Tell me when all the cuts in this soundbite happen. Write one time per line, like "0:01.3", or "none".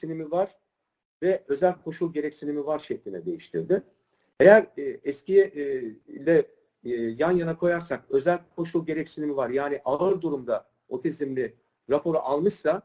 none

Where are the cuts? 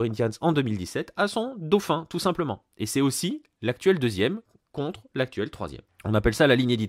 0:05.9

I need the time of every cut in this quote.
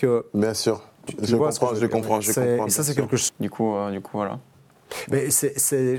0:03.3

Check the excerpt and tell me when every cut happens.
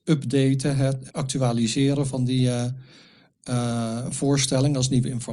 0:01.1

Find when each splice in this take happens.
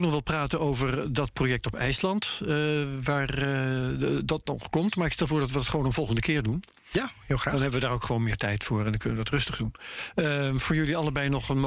none

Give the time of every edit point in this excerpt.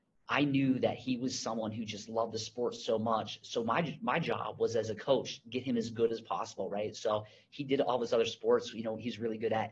none

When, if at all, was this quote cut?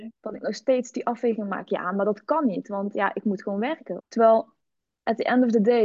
0:04.0

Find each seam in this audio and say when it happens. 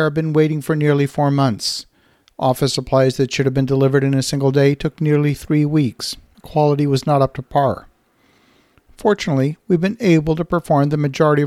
0:06.3

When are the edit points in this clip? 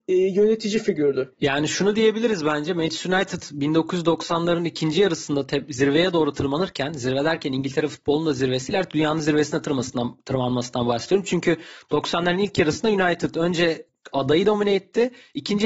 none

